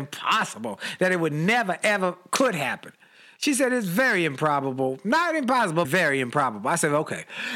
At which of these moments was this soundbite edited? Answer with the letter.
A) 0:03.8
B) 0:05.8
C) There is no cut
B